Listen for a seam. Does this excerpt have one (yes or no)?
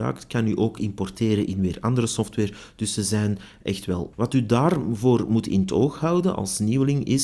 yes